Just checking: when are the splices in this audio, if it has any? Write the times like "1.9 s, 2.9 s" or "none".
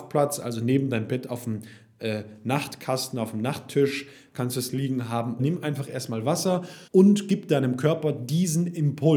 5.4 s, 6.9 s